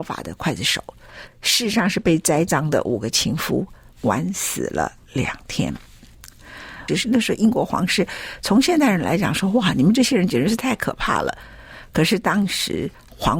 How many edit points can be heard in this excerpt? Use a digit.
2